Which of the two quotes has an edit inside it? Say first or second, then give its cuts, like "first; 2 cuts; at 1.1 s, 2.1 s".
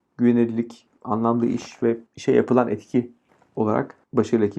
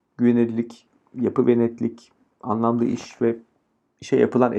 first; 2 cuts; at 1.0 s, 2.1 s